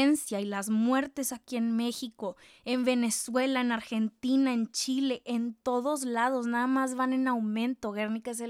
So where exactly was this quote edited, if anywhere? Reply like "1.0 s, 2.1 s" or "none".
none